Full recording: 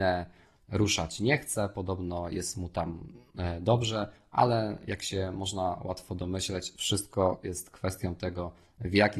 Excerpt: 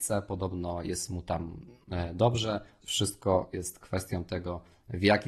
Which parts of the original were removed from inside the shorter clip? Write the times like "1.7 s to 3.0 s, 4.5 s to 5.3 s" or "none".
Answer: 4.3 s to 6.7 s